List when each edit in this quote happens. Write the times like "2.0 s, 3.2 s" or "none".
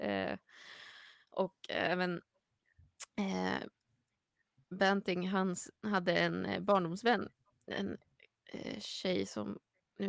none